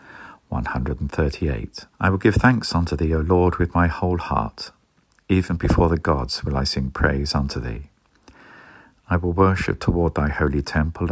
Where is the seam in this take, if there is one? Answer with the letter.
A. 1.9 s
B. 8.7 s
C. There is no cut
A